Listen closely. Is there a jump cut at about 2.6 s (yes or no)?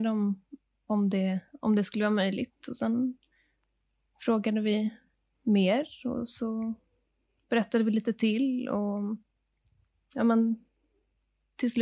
no